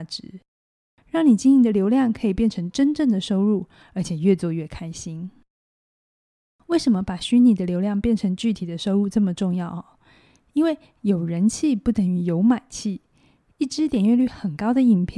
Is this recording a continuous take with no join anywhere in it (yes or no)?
yes